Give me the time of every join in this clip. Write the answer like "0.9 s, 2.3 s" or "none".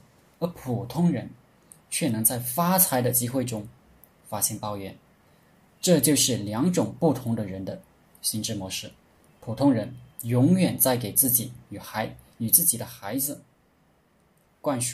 none

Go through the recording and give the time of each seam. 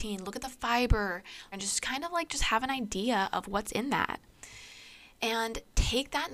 1.5 s

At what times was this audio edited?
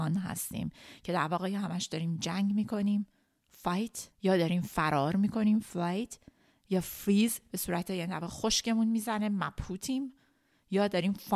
4.1 s

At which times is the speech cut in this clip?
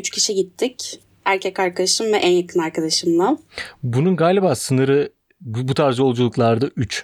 none

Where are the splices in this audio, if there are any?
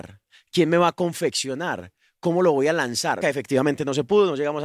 3.2 s

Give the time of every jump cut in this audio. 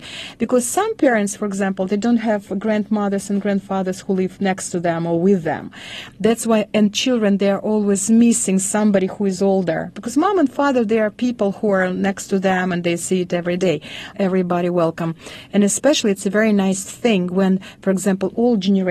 14.1 s

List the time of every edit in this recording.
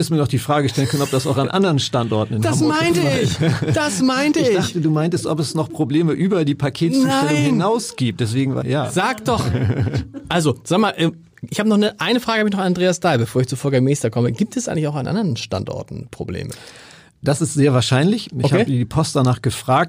8.6 s

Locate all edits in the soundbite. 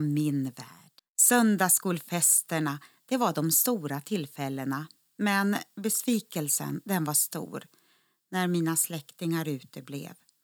1.0 s

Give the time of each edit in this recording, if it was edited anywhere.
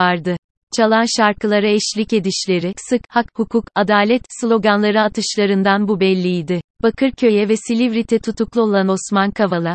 2.7 s, 6.8 s

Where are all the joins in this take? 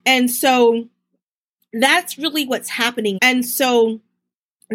3.1 s

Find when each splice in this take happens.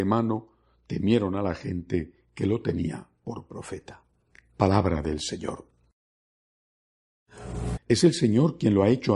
7.8 s

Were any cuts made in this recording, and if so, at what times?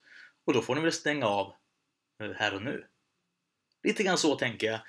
none

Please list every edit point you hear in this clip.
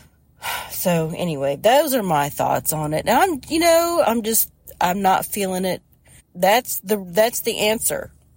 4.0 s, 6.2 s

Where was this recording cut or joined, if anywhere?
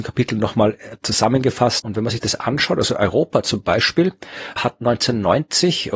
1.8 s, 4.6 s

